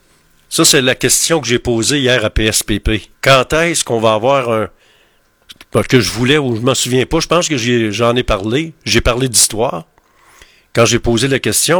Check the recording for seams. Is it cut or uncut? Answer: cut